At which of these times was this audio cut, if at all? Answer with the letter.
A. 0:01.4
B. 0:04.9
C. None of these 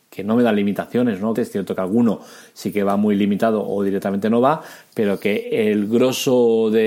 A